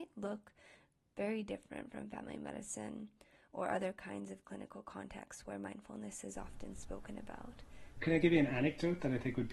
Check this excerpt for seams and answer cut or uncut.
cut